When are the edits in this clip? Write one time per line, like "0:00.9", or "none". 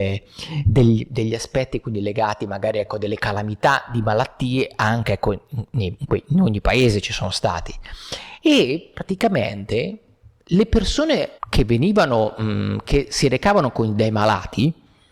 0:11.4